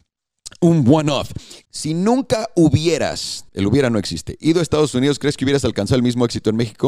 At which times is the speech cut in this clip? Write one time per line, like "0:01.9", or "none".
0:01.6
0:03.5